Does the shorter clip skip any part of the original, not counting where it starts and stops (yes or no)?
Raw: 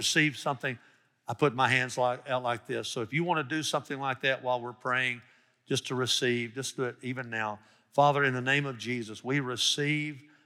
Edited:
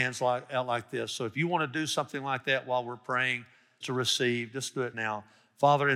yes